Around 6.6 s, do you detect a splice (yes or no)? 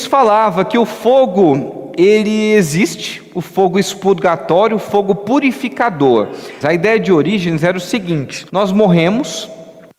yes